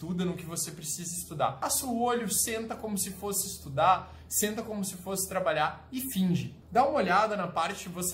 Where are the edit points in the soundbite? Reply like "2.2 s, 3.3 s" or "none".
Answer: 6.6 s